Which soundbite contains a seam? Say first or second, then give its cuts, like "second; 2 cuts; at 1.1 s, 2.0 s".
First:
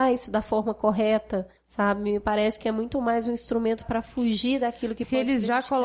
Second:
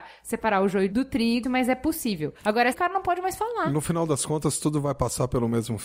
second; 2 cuts; at 1.4 s, 2.7 s